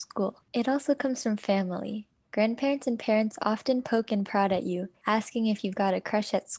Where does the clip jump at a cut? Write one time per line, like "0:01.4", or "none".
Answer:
none